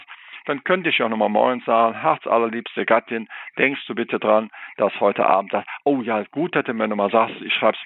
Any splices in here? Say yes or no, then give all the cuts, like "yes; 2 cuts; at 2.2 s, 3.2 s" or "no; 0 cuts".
no; 0 cuts